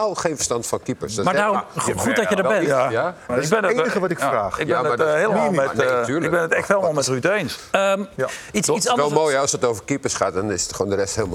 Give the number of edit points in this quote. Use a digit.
2